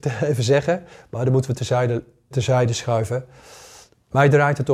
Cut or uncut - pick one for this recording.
cut